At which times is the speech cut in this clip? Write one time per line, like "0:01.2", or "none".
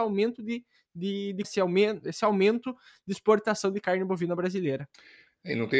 0:01.4

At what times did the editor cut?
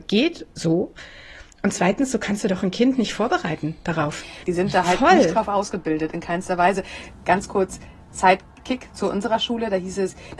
0:04.4

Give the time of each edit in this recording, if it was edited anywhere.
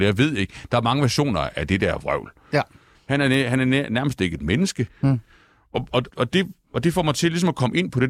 0:02.9
0:04.9
0:06.1

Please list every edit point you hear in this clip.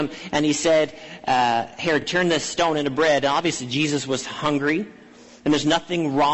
none

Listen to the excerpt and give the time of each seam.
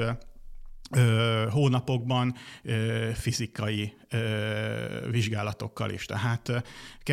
none

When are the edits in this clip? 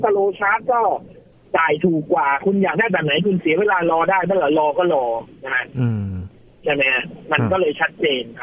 none

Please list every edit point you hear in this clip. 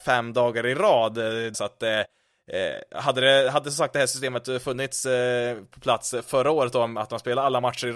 0:01.5

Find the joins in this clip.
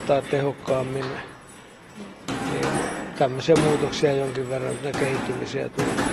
none

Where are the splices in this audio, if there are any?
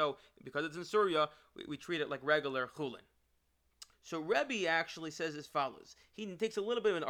0:03.9

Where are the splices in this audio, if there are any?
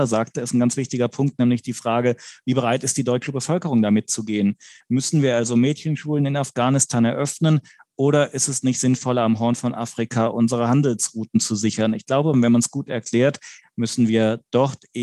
0:04.8
0:12.3
0:13.6

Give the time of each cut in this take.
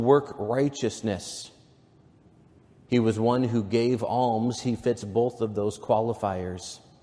0:02.9

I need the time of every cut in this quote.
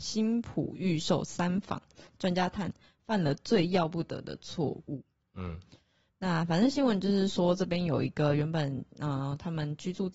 none

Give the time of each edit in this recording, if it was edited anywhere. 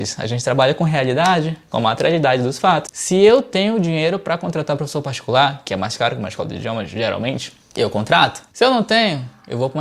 0:02.9

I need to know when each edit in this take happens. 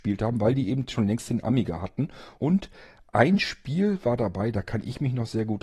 0:02.4

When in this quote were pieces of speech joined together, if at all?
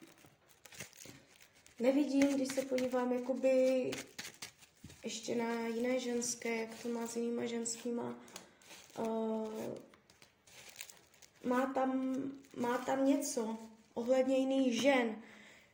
none

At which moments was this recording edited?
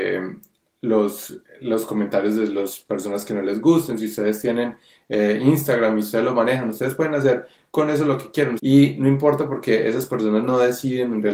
0:08.6

